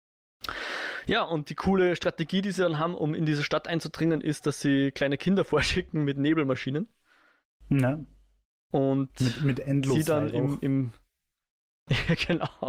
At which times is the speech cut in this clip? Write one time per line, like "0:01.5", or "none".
none